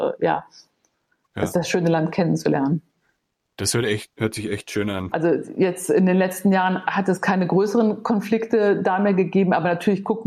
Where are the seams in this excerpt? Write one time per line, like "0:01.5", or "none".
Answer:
0:05.1

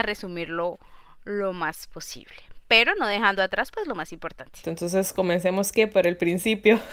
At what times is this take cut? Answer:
none

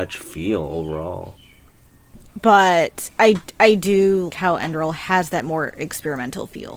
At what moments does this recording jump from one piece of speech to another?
0:02.3
0:04.3

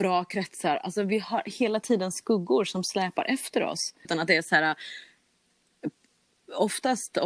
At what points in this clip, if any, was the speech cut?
0:04.0

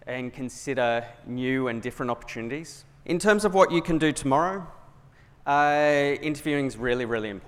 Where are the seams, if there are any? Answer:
0:03.0

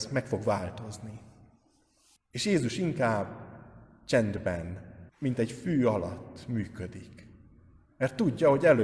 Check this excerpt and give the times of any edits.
0:02.2
0:05.1

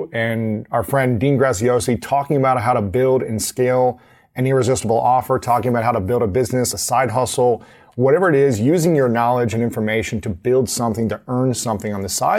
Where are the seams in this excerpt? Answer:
none

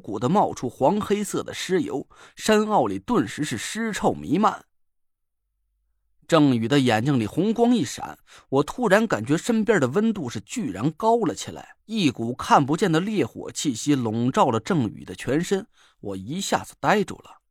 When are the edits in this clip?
0:11.8

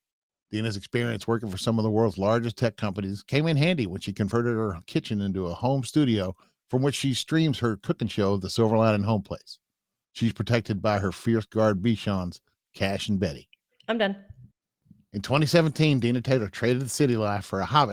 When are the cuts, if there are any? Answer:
0:13.7

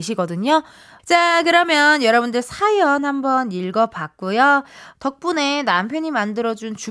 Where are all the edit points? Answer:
0:01.0
0:04.9

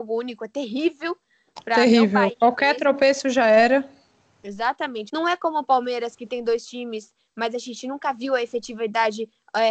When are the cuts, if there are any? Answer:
0:05.1

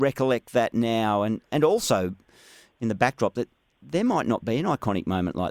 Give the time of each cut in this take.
none

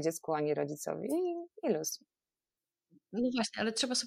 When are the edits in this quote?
none

